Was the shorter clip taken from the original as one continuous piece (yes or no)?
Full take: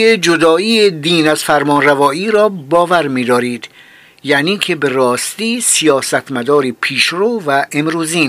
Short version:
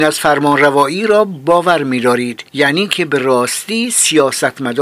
no